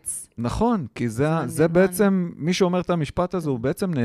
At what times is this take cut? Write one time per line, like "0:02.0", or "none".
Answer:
none